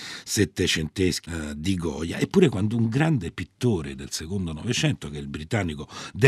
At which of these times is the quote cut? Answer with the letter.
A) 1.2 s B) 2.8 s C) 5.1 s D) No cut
A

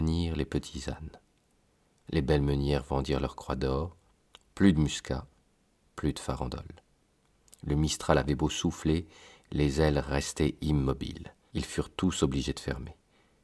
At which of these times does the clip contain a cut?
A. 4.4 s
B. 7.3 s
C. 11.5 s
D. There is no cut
C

